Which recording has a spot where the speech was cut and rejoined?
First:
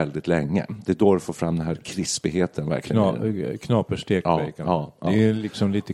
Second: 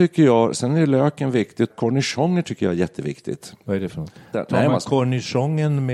second; 2 cuts; at 1.7 s, 4.3 s

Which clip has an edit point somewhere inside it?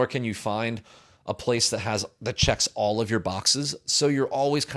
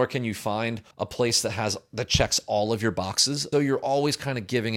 second; 2 cuts; at 0.9 s, 3.5 s

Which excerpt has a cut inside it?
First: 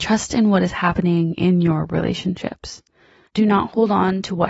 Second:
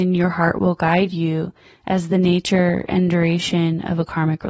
first; 1 cut; at 3.3 s

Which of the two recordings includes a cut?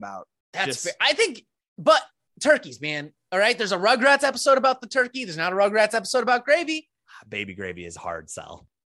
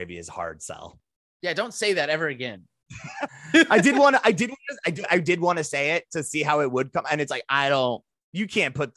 second; 1 cut; at 3.3 s

